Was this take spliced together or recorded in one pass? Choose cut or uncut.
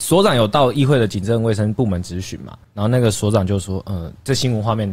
cut